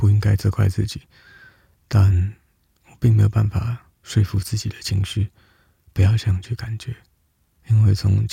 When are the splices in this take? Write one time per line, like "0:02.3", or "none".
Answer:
none